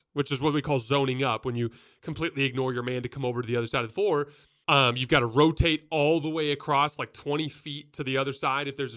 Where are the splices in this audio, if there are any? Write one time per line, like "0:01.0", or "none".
none